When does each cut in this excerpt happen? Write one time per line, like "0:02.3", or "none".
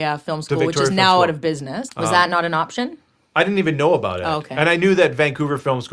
0:01.9